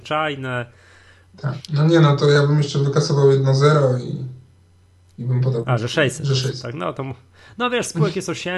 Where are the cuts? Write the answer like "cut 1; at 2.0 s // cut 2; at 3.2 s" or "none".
cut 1; at 1.7 s